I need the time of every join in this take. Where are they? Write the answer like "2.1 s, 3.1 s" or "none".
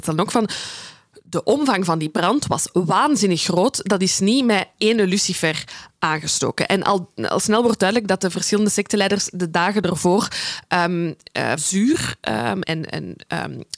11.6 s, 12.6 s